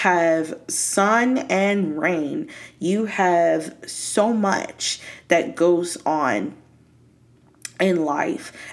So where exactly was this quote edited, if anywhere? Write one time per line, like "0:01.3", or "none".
none